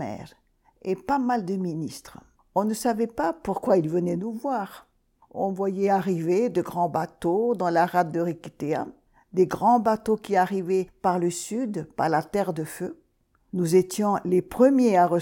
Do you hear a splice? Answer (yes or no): yes